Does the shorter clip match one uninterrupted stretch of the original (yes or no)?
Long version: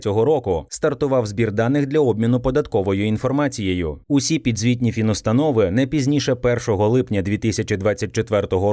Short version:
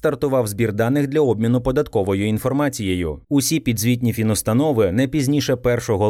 yes